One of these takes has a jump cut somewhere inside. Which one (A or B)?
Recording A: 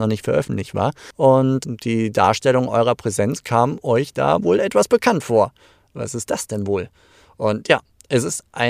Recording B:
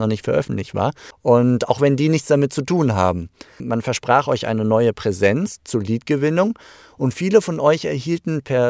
B